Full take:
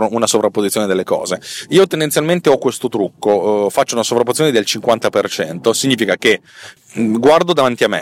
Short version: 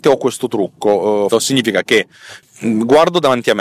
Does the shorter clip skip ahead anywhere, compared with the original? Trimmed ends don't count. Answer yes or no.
yes